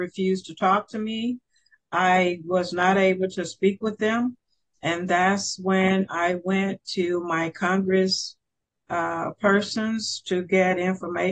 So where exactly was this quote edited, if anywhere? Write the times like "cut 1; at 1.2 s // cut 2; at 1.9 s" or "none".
none